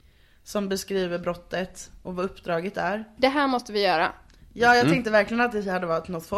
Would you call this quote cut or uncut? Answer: cut